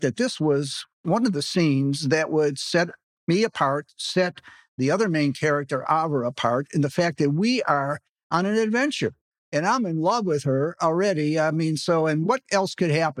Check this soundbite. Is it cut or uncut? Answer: uncut